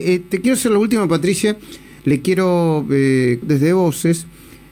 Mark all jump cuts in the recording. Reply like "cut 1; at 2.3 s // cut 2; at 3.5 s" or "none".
cut 1; at 2.0 s // cut 2; at 3.4 s